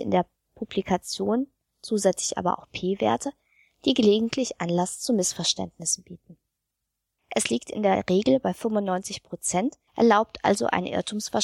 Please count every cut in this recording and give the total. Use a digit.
2